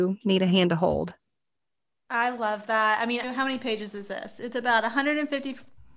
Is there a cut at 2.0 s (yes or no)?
no